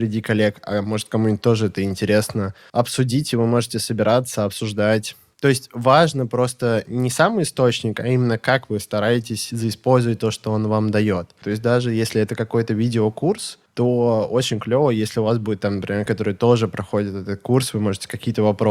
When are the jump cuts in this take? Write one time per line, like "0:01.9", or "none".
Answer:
0:05.3
0:11.4
0:16.1